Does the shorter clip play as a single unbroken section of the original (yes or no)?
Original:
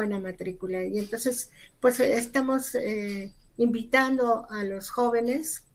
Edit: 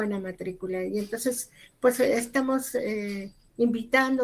yes